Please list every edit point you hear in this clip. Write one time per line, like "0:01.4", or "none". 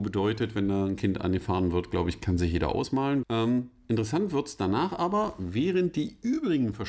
0:03.2